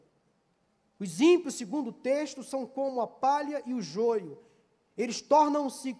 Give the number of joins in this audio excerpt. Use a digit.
0